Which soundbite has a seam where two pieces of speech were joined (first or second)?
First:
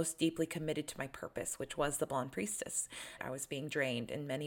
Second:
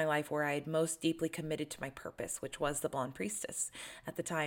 first